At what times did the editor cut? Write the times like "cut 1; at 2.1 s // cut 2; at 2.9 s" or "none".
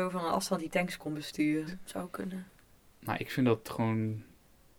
cut 1; at 1.7 s